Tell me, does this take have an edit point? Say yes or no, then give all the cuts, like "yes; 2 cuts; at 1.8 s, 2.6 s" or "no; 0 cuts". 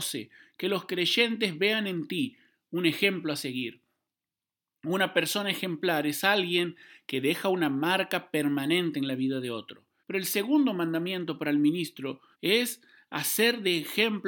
yes; 2 cuts; at 10.0 s, 12.3 s